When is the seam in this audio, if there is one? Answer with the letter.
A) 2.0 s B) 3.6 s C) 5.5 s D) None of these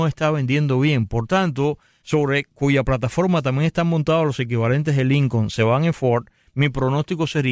A